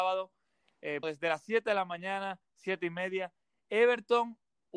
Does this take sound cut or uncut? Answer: cut